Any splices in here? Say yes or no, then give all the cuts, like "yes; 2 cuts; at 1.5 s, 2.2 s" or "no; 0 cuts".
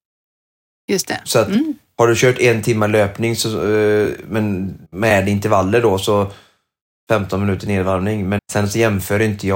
yes; 2 cuts; at 4.9 s, 8.4 s